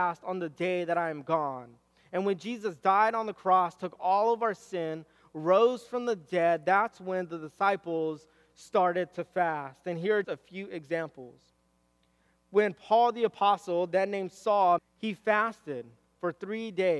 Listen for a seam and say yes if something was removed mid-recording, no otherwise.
yes